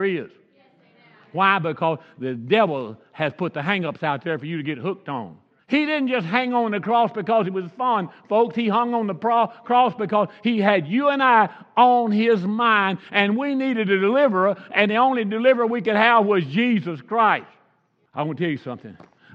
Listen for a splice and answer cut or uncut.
cut